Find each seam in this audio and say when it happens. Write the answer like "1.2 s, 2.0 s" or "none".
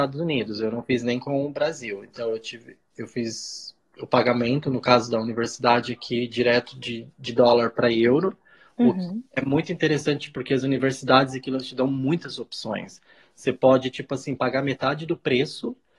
none